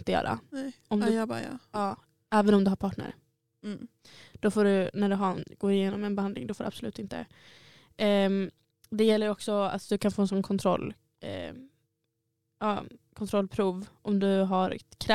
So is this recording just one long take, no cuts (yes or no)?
yes